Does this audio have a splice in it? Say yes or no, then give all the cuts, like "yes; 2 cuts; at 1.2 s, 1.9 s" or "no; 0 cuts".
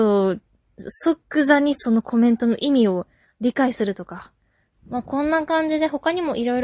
yes; 1 cut; at 4.7 s